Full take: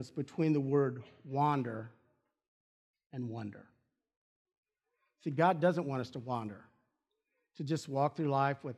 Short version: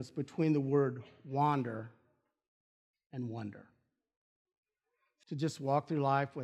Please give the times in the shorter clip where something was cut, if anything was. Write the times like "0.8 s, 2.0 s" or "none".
5.2 s